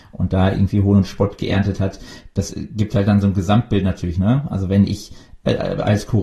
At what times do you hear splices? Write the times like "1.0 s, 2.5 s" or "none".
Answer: none